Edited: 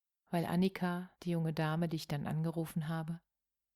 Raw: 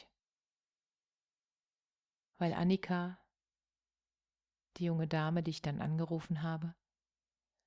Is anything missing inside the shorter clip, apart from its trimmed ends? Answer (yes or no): yes